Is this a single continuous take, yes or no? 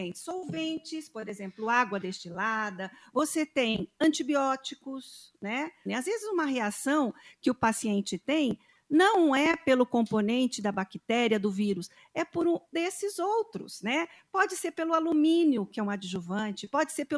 no